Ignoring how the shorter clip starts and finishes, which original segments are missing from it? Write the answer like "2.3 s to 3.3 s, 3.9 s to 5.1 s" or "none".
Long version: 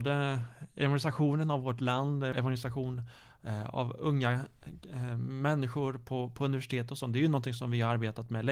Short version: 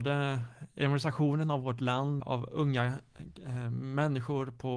2.2 s to 3.7 s